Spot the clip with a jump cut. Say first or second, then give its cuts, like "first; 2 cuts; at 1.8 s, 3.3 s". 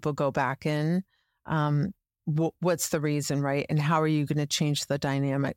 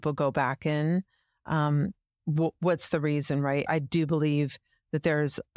second; 1 cut; at 3.7 s